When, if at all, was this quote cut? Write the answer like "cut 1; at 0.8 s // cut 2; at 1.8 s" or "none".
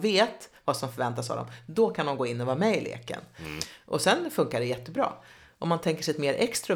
none